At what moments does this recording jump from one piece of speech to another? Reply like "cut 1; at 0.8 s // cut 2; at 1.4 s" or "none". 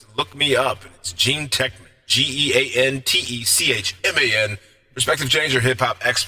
none